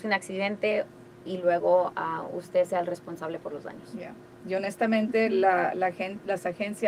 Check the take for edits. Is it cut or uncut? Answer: uncut